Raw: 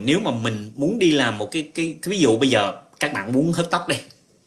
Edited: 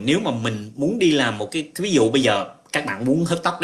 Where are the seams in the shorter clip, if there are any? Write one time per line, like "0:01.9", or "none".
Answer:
0:01.7